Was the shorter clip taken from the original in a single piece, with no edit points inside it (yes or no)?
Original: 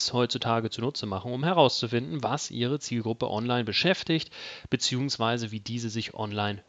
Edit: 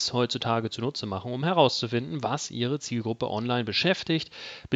yes